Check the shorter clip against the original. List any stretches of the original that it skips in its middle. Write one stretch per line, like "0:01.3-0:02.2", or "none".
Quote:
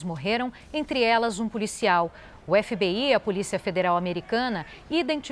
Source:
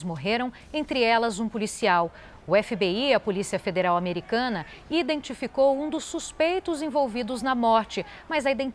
none